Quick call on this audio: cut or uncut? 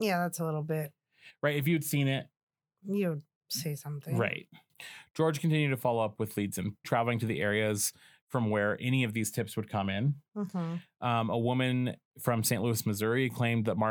cut